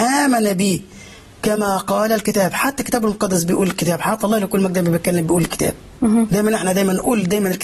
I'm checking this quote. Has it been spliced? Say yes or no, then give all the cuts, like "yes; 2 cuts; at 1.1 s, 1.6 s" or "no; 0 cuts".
no; 0 cuts